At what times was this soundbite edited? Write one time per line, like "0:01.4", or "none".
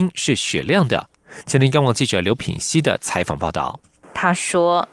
0:04.0